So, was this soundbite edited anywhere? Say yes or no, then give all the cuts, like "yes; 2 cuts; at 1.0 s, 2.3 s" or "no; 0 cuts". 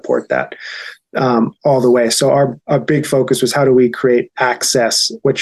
no; 0 cuts